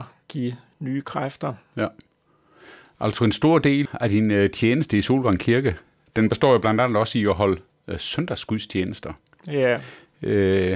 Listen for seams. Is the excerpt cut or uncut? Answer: cut